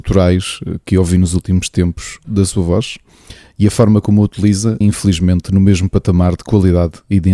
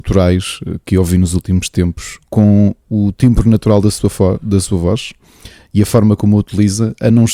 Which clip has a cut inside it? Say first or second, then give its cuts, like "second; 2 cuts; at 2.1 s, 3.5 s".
first; 2 cuts; at 2.2 s, 4.8 s